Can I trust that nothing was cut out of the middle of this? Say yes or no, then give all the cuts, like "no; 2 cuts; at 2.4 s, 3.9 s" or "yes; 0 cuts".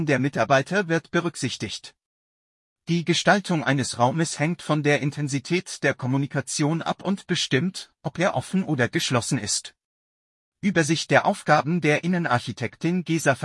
yes; 0 cuts